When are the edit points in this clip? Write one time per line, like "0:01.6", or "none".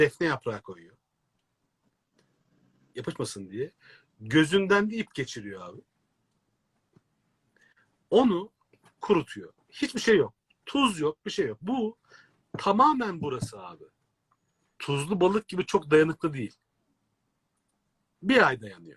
0:14.7